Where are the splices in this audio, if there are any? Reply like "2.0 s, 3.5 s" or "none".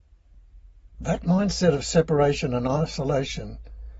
0.9 s